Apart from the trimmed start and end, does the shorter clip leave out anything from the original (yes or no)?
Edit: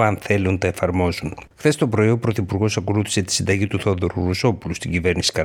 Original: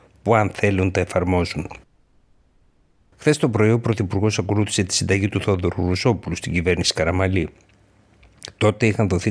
yes